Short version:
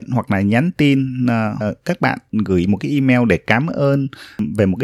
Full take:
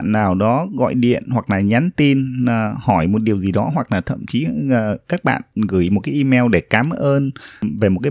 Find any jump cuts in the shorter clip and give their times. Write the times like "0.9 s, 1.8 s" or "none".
1.6 s